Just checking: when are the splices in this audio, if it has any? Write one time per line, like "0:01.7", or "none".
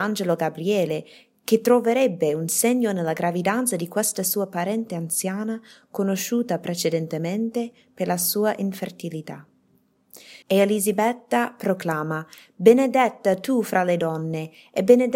0:10.4